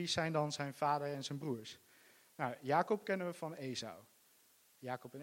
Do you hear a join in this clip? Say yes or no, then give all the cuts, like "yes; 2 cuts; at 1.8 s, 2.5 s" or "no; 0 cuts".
no; 0 cuts